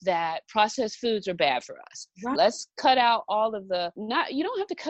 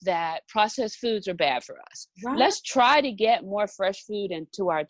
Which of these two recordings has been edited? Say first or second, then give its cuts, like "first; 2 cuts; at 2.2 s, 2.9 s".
first; 1 cut; at 2.4 s